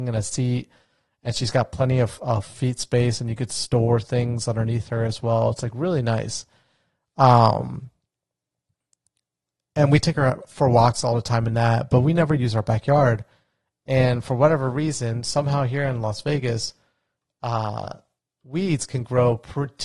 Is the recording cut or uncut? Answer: uncut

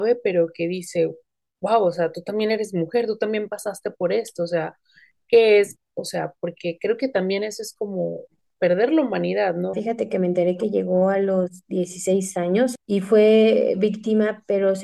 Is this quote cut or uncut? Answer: cut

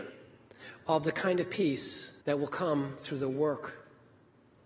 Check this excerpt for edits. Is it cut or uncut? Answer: cut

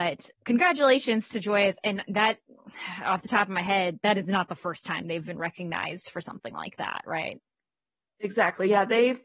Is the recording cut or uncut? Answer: uncut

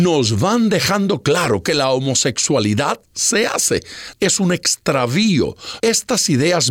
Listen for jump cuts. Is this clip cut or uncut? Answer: cut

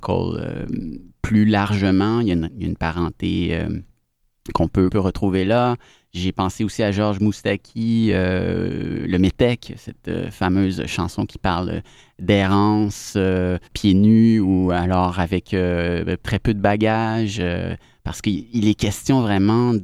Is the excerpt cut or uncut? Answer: cut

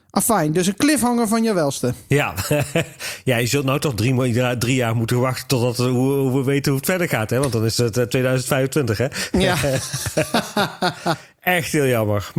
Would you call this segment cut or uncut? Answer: uncut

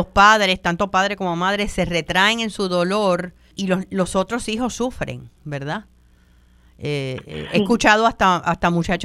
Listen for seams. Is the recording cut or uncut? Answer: cut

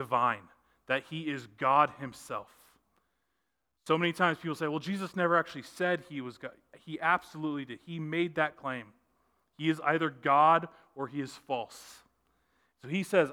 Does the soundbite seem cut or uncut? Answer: uncut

